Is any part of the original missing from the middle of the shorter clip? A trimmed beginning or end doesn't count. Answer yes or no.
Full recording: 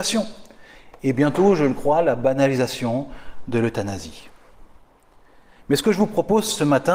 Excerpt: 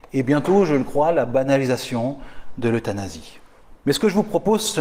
yes